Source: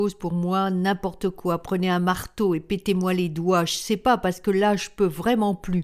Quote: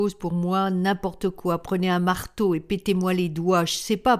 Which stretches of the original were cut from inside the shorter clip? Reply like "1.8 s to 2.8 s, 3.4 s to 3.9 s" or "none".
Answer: none